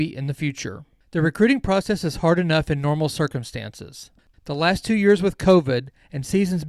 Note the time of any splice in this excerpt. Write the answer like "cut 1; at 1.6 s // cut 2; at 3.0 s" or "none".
none